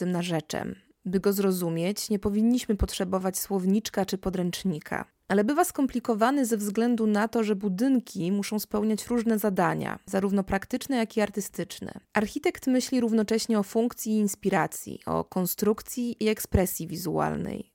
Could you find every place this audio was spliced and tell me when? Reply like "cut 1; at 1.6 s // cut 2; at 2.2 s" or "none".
none